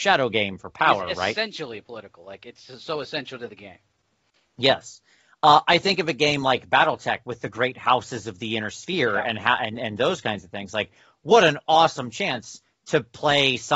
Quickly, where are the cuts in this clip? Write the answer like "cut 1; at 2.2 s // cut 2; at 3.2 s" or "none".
none